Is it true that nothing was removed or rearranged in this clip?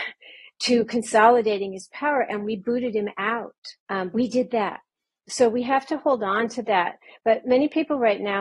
no; 1 cut; at 3.8 s

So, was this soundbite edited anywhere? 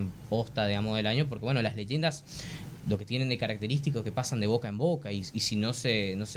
no; 0 cuts

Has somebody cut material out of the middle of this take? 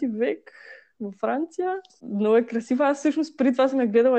yes; 1 cut; at 2.0 s

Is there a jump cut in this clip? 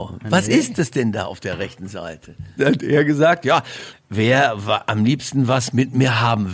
yes; 2 cuts; at 2.6 s, 3.9 s

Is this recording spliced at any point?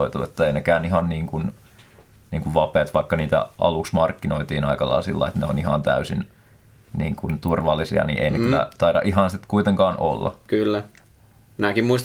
no; 0 cuts

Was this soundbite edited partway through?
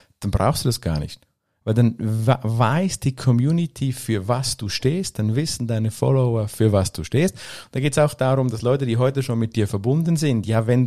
no; 0 cuts

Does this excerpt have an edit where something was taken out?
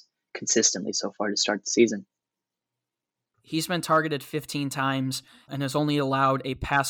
yes; 2 cuts; at 3.3 s, 5.5 s

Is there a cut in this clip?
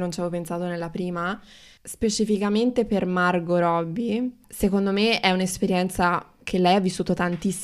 yes; 1 cut; at 1.8 s

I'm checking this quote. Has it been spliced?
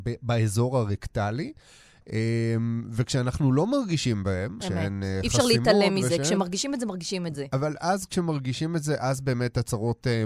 yes; 1 cut; at 4.6 s

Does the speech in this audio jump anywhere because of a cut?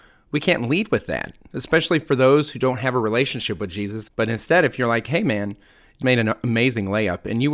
yes; 2 cuts; at 4.1 s, 6.0 s

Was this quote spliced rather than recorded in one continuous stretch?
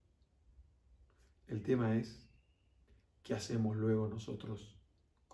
no; 0 cuts

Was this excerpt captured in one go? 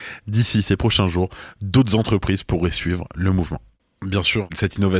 yes; 0 cuts

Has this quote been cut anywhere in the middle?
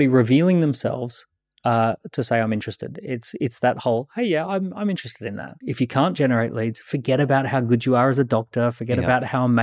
yes; 1 cut; at 5.6 s

